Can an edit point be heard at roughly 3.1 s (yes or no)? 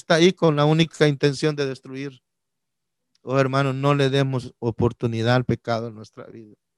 no